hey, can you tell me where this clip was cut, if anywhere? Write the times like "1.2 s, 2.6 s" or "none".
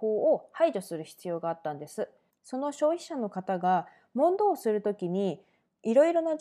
2.3 s